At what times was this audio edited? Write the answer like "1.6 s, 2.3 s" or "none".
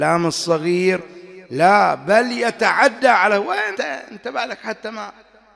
3.7 s